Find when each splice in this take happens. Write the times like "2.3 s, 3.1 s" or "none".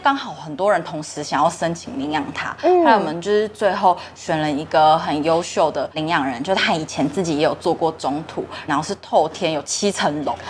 8.7 s